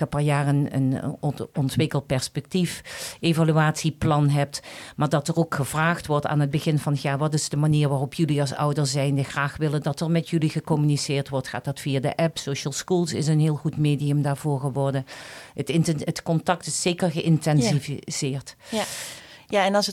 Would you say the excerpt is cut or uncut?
uncut